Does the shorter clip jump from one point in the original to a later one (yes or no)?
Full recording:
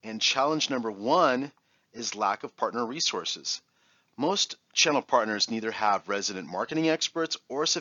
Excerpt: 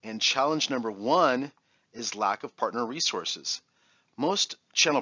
no